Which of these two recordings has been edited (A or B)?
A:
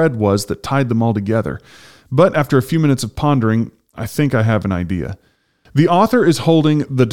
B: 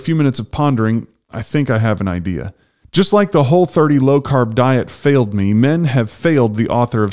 B